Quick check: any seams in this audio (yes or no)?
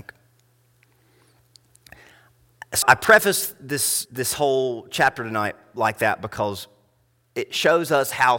yes